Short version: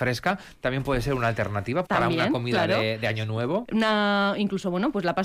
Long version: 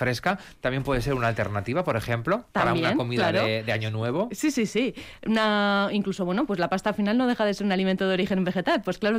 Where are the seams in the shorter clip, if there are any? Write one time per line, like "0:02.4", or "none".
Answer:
0:01.9
0:03.6